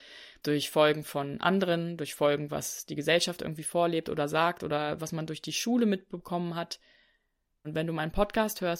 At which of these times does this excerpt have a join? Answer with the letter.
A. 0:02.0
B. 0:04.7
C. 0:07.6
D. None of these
C